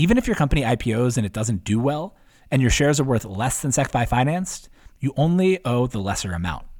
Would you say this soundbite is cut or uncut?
uncut